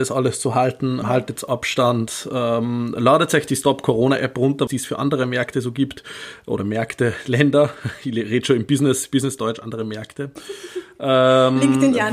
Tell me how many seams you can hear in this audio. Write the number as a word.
two